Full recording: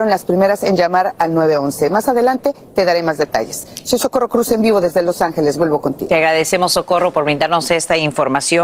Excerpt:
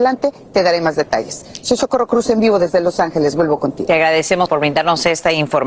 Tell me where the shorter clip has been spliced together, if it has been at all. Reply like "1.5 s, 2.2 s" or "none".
4.5 s